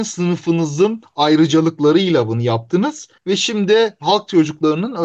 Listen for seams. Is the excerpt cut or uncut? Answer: cut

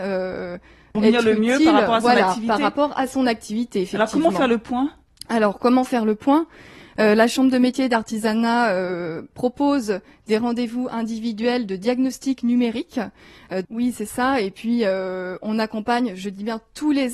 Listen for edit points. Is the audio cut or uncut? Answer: cut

